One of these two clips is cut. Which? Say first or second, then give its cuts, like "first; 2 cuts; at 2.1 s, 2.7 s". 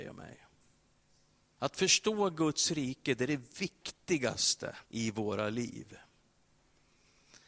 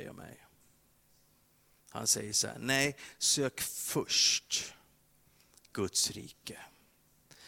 first; 2 cuts; at 1.6 s, 4.8 s